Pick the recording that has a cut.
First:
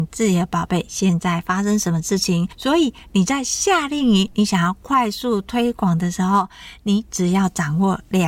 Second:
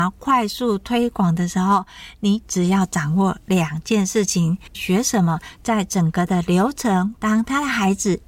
second; 2 cuts; at 4.7 s, 7.2 s

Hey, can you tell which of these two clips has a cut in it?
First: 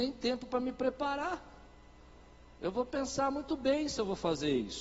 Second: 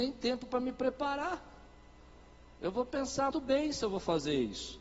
second; 1 cut; at 3.3 s

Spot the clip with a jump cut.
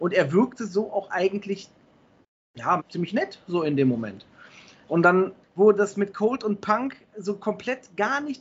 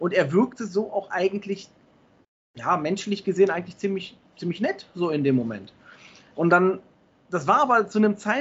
first; 2 cuts; at 2.8 s, 5.4 s

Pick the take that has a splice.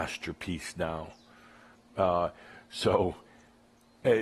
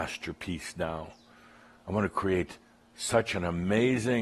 first; 1 cut; at 1.8 s

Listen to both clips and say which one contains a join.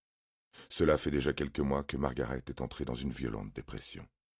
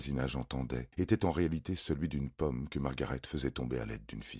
second; 1 cut; at 0.9 s

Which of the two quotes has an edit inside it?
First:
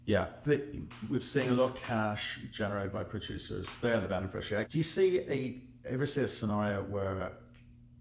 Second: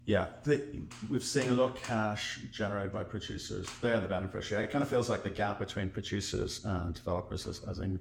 first; 1 cut; at 4.6 s

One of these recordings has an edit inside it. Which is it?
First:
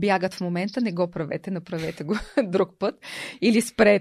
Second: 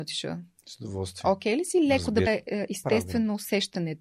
second; 1 cut; at 2.3 s

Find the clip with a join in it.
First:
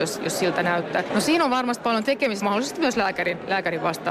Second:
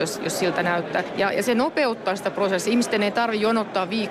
first; 2 cuts; at 1.1 s, 2.4 s

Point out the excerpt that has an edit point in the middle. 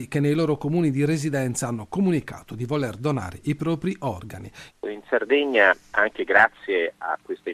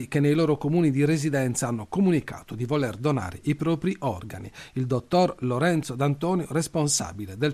first; 1 cut; at 4.7 s

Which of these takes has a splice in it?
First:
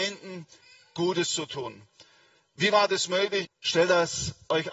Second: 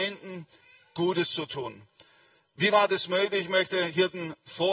first; 1 cut; at 3.4 s

